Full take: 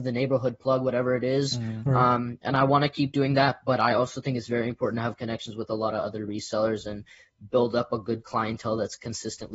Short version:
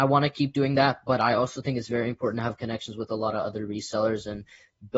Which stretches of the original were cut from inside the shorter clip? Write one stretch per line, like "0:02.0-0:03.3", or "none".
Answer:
none